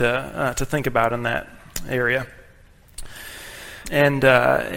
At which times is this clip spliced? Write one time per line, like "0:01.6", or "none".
0:03.8